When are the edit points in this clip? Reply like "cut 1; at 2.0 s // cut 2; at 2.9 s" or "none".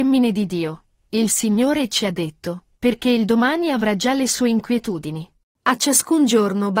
cut 1; at 2.7 s